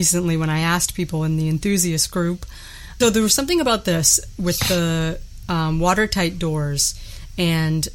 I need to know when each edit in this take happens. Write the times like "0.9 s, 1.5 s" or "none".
3.0 s

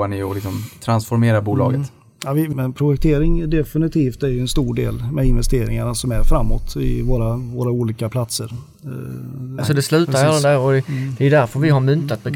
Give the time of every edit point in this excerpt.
2.5 s, 9.6 s

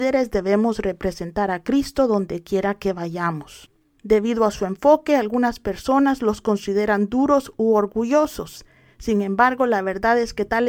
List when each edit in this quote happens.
4.0 s

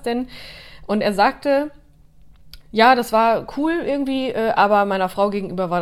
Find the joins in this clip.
2.6 s

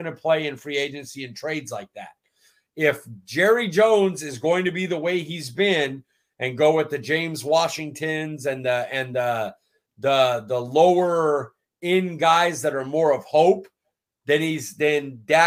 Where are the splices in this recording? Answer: none

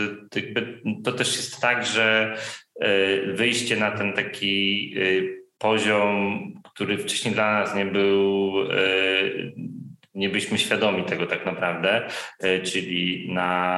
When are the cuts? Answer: none

